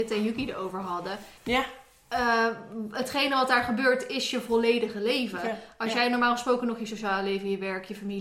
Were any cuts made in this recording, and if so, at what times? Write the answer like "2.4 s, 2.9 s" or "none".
1.4 s

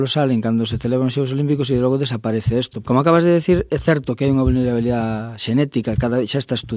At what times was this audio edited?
2.8 s

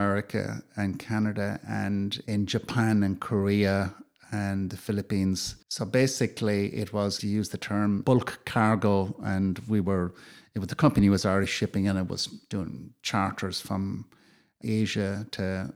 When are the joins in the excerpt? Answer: 5.6 s

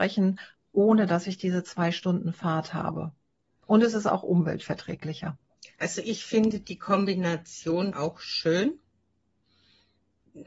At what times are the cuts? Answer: 7.9 s

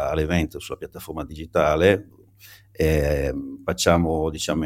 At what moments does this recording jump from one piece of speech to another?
none

